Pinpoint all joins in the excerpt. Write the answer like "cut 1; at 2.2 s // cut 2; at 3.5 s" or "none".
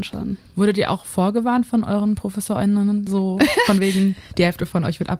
none

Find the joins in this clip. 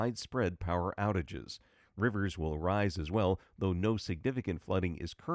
none

